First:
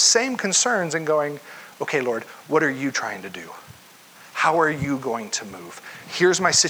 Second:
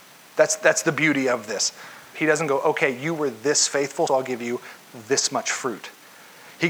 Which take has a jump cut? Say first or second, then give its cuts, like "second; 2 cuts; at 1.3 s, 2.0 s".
second; 2 cuts; at 2.1 s, 4.1 s